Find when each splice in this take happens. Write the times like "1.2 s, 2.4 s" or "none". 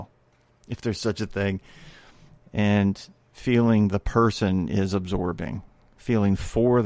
2.4 s